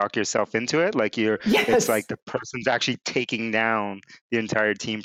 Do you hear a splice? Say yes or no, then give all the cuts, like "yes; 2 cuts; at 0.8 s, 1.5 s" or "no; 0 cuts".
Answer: no; 0 cuts